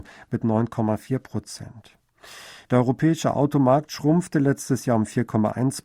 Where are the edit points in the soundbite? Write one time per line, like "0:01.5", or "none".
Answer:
0:02.7